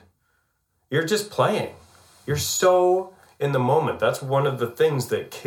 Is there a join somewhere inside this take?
no; 0 cuts

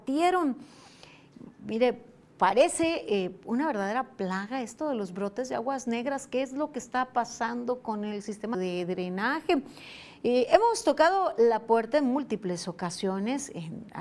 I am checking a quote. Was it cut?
yes; 1 cut; at 8.5 s

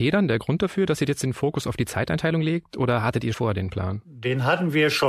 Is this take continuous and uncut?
no; 1 cut; at 3.3 s

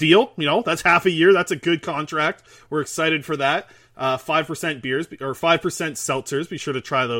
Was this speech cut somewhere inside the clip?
no; 0 cuts

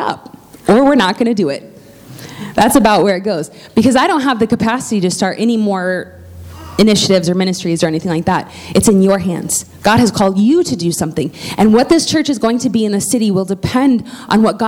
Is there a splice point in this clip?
no; 0 cuts

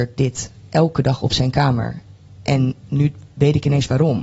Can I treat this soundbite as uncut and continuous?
yes; 0 cuts

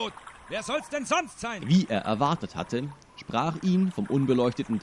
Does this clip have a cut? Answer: yes; 1 cut; at 1.6 s

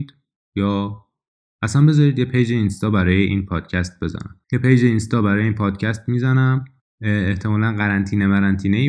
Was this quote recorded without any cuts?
yes; 0 cuts

